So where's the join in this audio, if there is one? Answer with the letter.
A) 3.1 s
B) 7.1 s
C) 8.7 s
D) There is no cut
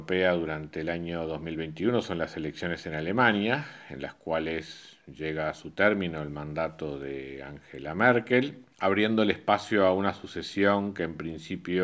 C